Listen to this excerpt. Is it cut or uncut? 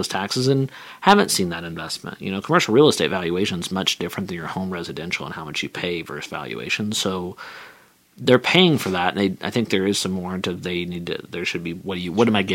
uncut